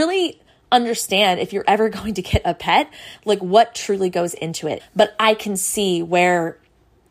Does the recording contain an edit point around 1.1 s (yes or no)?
no